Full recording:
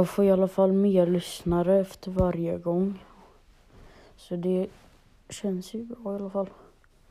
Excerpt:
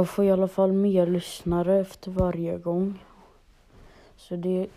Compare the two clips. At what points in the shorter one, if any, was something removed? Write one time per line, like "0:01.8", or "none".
none